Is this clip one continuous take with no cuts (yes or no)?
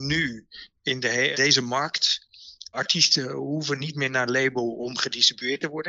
no